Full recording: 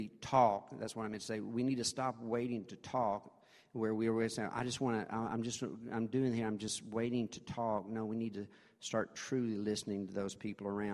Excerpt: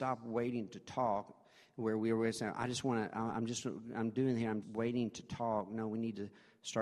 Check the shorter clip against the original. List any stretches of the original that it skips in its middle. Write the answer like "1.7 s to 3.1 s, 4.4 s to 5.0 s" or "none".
6.6 s to 6.8 s

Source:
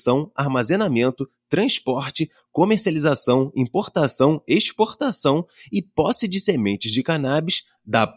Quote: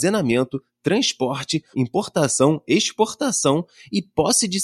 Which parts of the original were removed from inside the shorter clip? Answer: 2.4 s to 3.5 s

